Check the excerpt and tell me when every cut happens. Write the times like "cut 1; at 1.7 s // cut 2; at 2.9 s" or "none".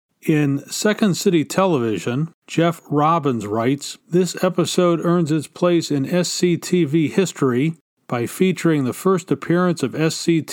cut 1; at 2.4 s // cut 2; at 4.0 s